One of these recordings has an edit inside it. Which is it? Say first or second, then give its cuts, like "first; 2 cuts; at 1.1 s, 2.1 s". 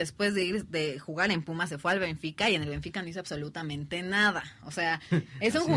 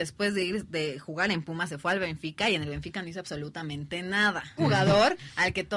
second; 1 cut; at 4.6 s